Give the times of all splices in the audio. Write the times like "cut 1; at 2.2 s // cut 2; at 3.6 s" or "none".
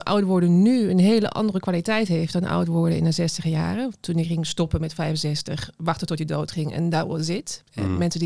none